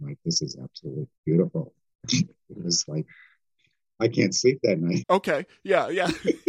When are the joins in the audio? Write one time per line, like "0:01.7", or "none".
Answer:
0:01.2
0:05.0